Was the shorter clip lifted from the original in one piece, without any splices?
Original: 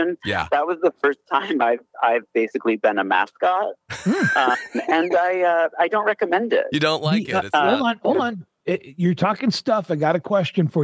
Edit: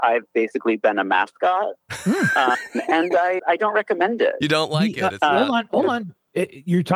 no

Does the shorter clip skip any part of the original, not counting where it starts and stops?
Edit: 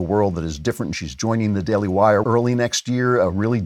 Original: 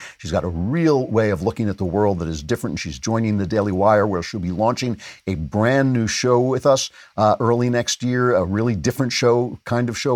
yes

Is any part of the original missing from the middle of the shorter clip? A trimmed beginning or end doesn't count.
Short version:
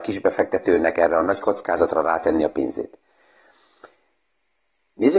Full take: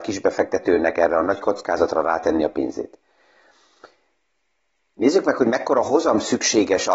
no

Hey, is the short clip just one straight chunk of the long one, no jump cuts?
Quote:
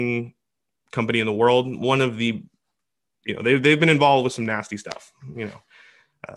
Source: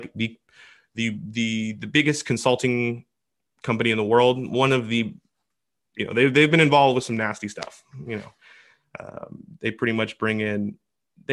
yes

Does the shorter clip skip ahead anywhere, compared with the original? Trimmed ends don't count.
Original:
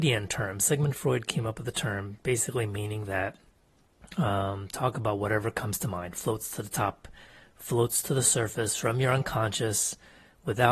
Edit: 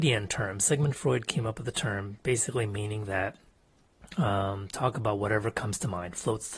no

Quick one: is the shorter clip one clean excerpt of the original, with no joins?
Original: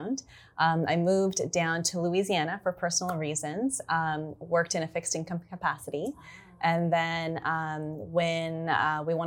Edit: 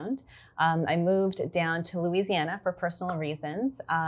yes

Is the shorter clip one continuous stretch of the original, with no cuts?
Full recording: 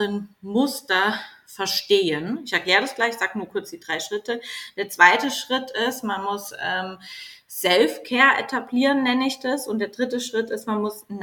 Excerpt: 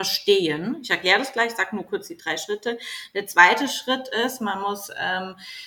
yes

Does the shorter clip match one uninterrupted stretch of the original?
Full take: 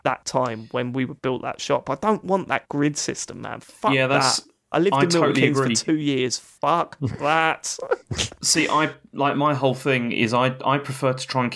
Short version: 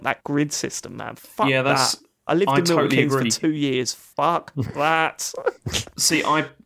yes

